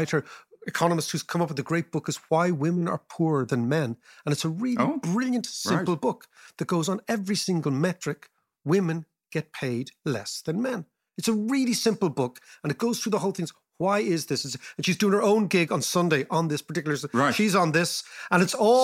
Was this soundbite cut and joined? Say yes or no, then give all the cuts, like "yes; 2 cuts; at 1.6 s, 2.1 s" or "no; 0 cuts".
no; 0 cuts